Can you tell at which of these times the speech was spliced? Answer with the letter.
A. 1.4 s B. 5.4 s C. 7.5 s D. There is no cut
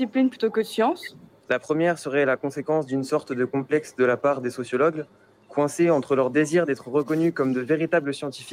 A